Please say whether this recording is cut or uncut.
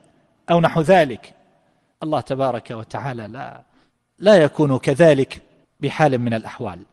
uncut